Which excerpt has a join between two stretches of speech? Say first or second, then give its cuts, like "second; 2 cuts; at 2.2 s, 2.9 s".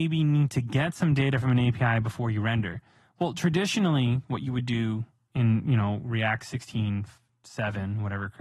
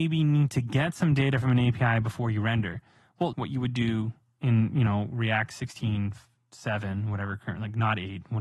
second; 1 cut; at 3.3 s